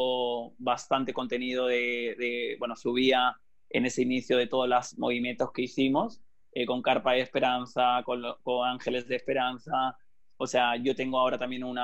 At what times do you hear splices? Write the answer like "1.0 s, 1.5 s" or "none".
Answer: none

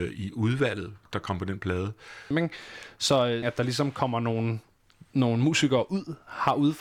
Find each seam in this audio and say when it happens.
1.1 s, 2.3 s, 3.4 s

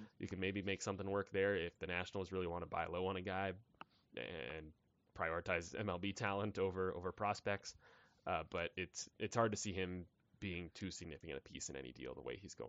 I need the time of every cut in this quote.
none

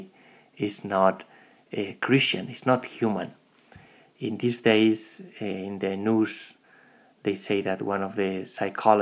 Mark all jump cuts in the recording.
none

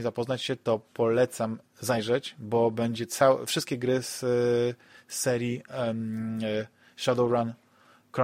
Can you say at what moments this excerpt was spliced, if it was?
none

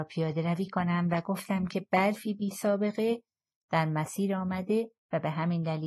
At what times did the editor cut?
none

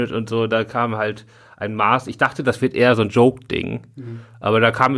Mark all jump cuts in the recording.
none

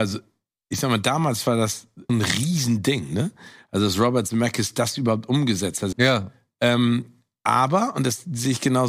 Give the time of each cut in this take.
2.1 s, 5.9 s

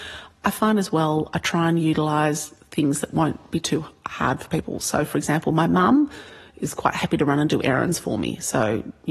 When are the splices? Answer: none

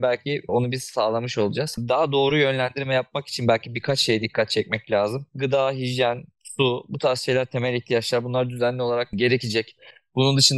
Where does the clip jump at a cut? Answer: none

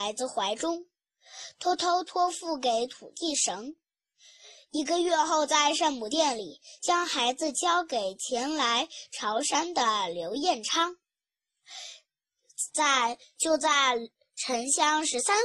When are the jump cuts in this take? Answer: 12.7 s

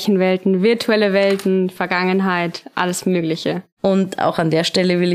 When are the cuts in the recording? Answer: 3.8 s

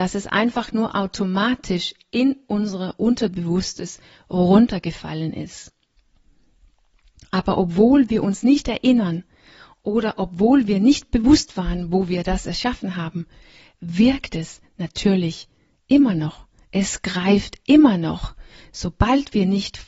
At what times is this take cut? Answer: none

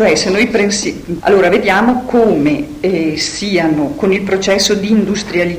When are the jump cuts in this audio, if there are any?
1.2 s

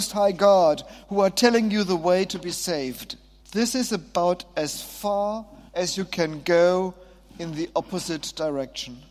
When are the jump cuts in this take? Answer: 3.4 s, 5.7 s

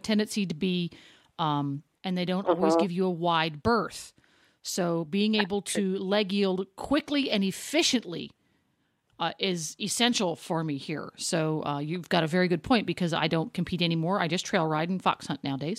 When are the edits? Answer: 2.0 s

